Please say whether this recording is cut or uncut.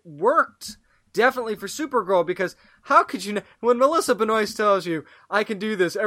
uncut